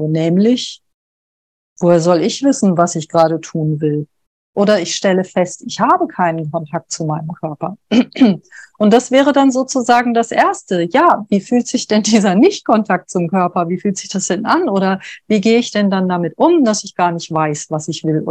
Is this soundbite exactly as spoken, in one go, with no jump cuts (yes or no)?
yes